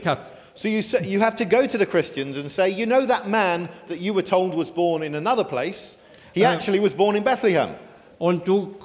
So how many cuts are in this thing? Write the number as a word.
zero